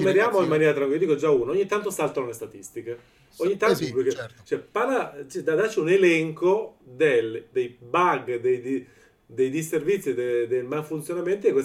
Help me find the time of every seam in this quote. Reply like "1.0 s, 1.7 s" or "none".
3.8 s